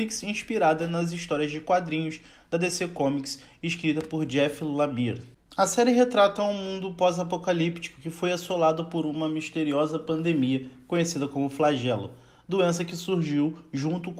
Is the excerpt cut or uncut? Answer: uncut